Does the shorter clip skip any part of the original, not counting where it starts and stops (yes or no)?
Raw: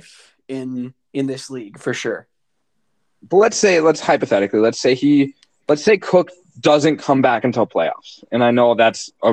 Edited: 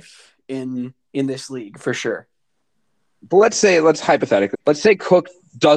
yes